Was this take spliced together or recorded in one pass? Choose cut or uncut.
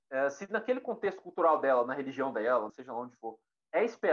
cut